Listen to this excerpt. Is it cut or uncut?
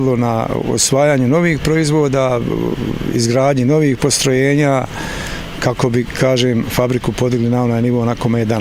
uncut